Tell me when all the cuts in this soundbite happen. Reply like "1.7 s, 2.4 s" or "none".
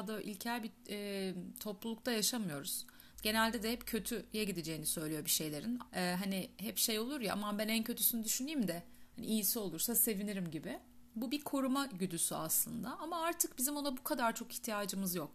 3.1 s, 5.9 s